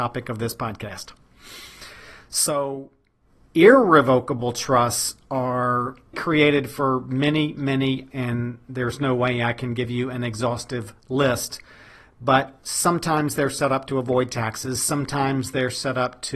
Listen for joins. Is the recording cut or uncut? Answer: cut